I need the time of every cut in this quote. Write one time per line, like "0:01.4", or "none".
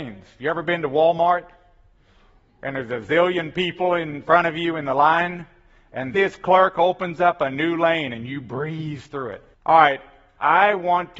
0:06.1
0:09.5